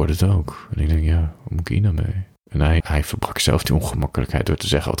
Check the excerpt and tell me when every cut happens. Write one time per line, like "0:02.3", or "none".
0:02.8